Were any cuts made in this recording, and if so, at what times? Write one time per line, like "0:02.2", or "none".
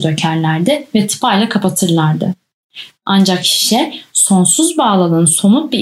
0:02.9